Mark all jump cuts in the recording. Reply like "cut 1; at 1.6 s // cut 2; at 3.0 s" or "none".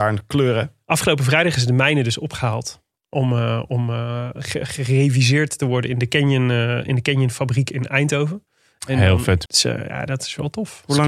cut 1; at 9.5 s